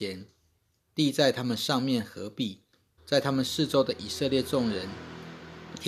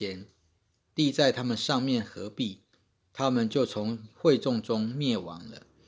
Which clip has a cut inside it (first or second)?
first